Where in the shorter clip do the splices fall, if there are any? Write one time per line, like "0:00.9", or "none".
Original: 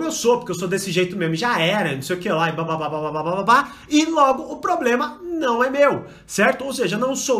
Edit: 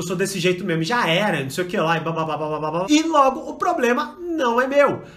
0:02.8